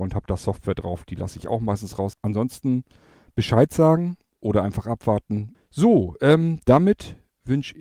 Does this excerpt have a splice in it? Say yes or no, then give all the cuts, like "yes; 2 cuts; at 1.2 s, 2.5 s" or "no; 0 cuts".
yes; 2 cuts; at 2.1 s, 5.5 s